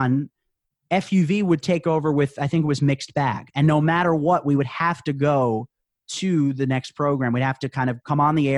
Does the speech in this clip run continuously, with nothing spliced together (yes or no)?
yes